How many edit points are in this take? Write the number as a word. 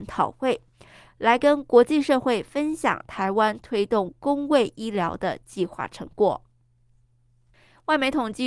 zero